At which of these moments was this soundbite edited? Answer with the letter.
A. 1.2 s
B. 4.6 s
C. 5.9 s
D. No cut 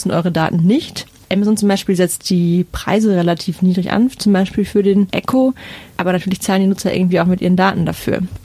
D